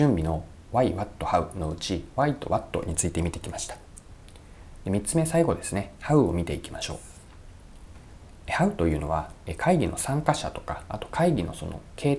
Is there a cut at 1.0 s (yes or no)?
no